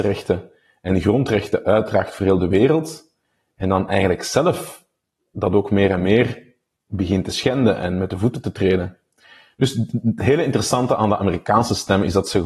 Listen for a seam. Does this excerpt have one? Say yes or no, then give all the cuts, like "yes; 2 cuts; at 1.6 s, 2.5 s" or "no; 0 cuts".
no; 0 cuts